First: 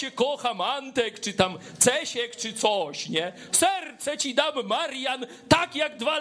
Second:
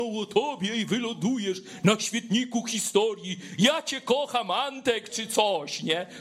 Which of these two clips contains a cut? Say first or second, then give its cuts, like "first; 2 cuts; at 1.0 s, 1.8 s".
second; 1 cut; at 5.1 s